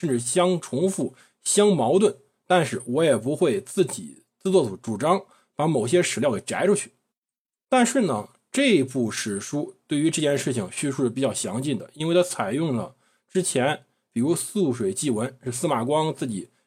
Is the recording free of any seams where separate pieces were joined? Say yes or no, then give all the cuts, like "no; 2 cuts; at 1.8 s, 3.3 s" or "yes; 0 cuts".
yes; 0 cuts